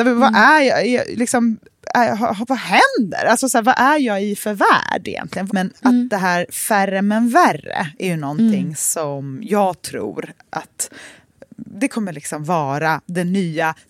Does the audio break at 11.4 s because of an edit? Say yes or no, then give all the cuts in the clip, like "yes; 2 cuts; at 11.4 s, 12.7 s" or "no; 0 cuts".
no; 2 cuts; at 2.5 s, 5.5 s